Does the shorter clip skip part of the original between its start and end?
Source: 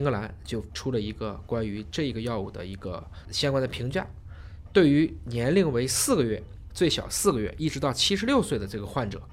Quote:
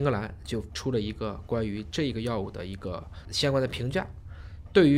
no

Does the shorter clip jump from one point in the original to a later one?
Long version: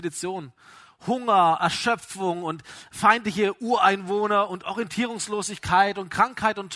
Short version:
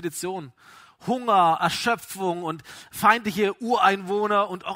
no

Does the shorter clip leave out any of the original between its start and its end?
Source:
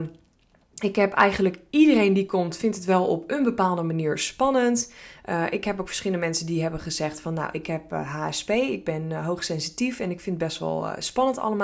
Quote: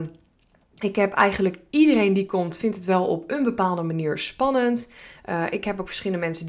no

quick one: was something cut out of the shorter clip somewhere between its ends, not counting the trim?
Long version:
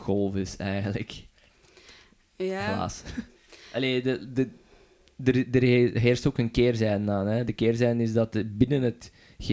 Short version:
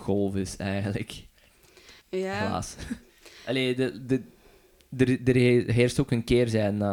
yes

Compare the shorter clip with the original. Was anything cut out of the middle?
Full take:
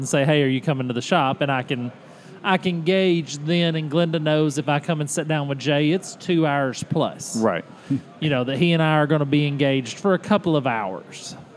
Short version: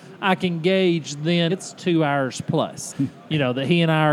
yes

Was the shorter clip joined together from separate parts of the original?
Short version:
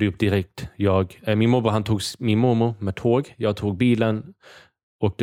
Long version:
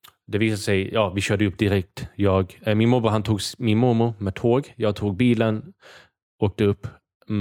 no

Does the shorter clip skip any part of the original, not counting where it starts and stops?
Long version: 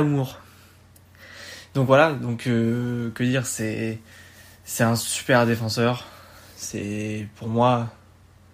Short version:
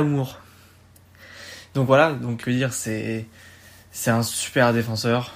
yes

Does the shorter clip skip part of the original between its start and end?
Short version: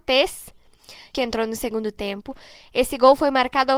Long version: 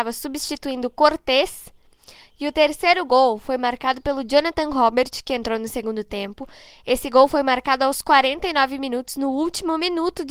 yes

